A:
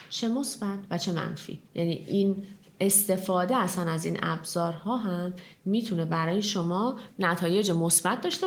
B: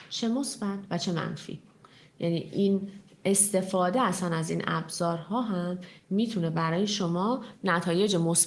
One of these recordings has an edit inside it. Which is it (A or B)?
A